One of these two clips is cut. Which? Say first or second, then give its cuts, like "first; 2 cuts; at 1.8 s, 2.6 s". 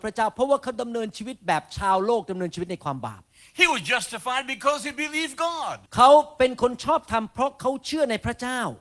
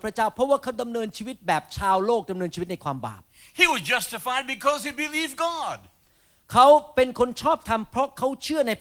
first; 1 cut; at 5.9 s